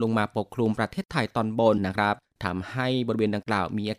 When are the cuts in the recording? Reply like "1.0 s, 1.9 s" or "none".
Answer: 1.8 s

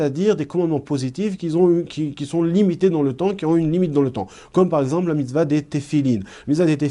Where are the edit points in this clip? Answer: none

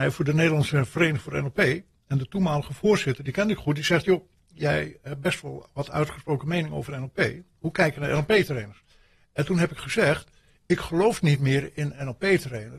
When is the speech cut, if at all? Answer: none

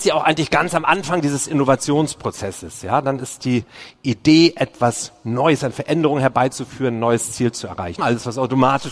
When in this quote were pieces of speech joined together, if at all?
8.0 s

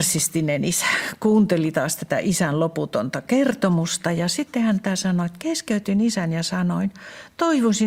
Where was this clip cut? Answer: none

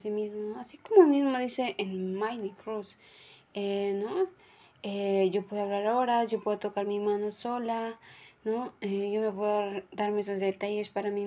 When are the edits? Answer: none

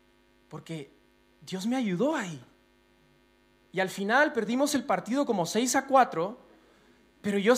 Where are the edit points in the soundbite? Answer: none

